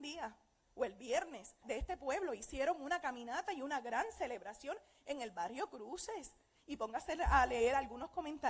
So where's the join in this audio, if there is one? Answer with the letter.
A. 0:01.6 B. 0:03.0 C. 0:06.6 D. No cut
A